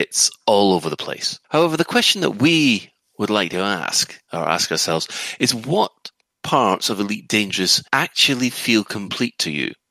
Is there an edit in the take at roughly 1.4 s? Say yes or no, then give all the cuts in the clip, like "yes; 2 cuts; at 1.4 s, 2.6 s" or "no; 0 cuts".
yes; 2 cuts; at 1.4 s, 7.9 s